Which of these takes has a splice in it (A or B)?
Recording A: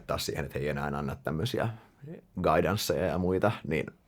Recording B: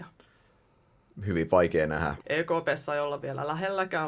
B